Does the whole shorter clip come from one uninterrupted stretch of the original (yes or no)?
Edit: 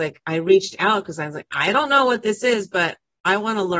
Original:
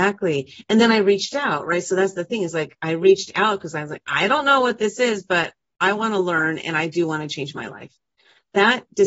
yes